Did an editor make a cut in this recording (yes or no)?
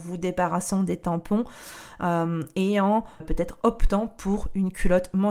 yes